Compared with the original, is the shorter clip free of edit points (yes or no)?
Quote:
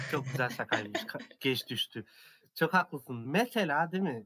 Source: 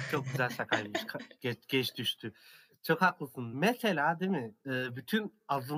no